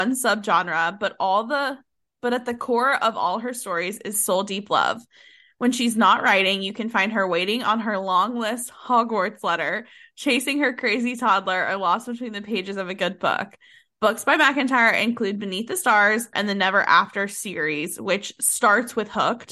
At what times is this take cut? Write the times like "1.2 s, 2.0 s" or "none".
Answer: 16.3 s